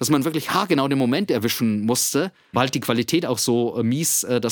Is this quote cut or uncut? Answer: cut